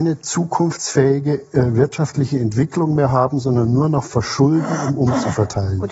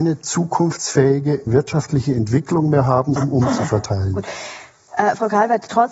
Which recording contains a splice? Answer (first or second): second